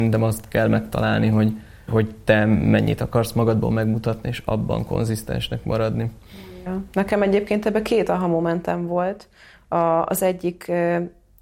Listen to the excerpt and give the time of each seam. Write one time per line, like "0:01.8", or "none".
0:01.9